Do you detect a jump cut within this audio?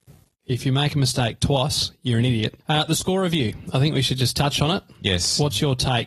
yes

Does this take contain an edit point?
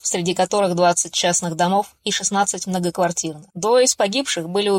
yes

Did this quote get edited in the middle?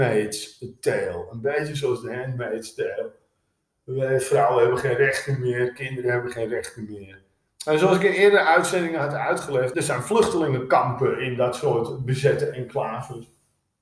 yes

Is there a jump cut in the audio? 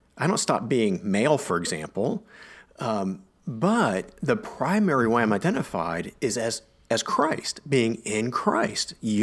no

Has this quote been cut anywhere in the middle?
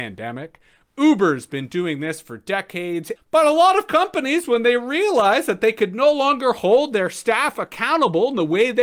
yes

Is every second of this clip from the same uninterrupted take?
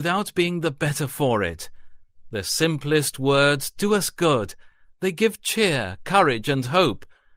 yes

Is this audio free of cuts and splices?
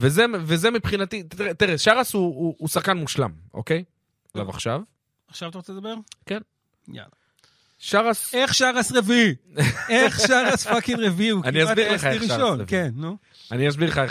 no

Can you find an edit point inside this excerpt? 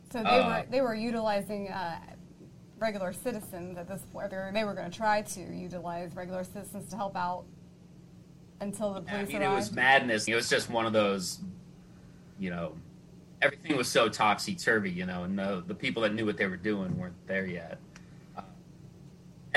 yes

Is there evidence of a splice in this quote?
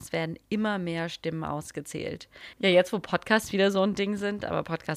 yes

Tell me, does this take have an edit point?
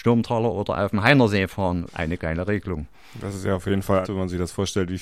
yes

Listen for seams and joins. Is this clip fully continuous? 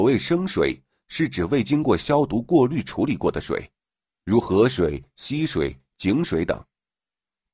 yes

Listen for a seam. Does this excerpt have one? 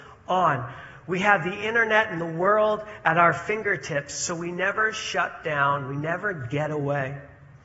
no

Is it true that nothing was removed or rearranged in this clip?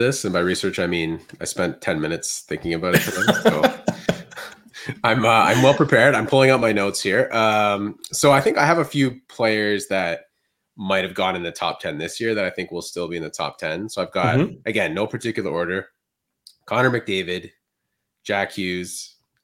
no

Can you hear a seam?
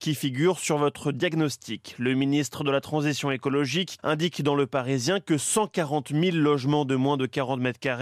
yes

